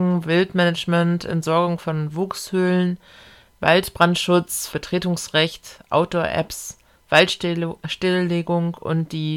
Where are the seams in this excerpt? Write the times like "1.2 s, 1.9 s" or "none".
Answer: 4.7 s